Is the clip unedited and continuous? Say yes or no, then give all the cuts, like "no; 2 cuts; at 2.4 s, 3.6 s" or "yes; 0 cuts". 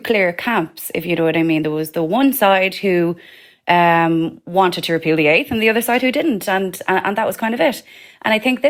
yes; 0 cuts